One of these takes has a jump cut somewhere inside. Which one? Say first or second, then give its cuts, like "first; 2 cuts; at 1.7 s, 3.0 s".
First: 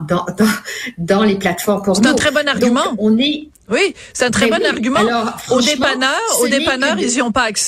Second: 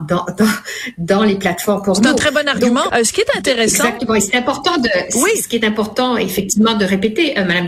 second; 1 cut; at 2.9 s